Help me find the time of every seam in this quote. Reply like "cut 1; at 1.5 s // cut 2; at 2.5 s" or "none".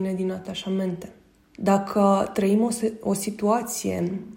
cut 1; at 1.5 s